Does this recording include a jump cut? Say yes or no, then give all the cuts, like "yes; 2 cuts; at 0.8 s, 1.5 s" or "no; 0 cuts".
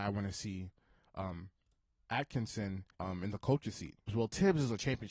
yes; 2 cuts; at 2.9 s, 4.1 s